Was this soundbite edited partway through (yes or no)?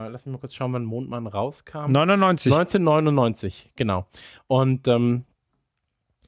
no